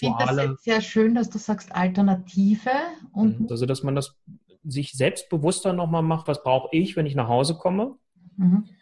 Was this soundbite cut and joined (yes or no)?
yes